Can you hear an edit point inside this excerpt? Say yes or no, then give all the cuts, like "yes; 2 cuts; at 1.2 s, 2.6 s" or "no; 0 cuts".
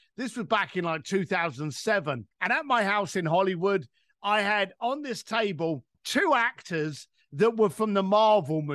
yes; 2 cuts; at 2.3 s, 5.9 s